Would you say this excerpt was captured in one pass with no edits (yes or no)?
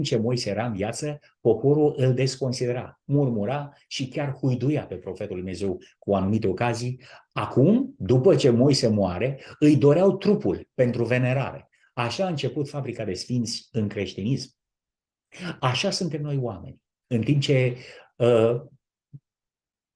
yes